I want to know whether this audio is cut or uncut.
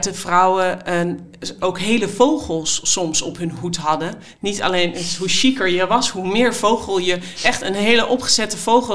uncut